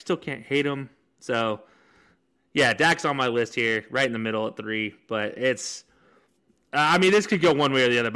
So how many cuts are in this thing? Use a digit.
0